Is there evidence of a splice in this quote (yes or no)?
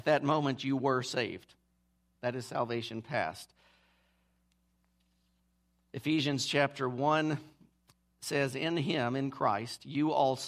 yes